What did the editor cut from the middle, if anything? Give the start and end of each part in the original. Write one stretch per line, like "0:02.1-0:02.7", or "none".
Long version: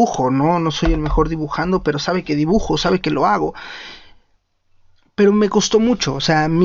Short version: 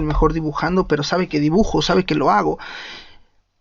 none